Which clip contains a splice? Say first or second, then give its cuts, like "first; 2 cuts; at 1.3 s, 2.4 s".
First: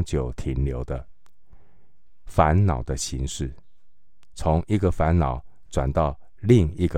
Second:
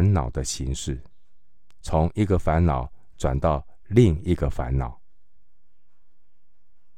first; 1 cut; at 2.2 s